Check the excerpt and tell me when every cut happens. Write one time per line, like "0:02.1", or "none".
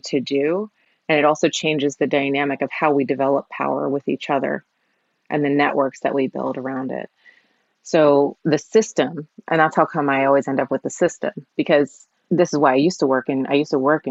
0:11.5